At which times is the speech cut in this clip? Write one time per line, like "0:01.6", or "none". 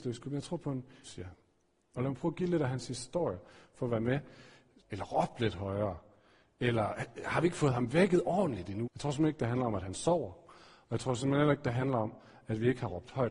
0:01.0
0:04.8
0:08.8